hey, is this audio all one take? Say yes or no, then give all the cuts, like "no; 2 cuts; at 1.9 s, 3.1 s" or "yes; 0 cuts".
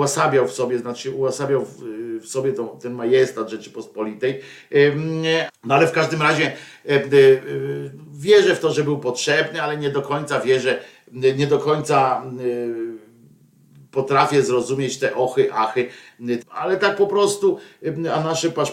no; 2 cuts; at 5.5 s, 16.4 s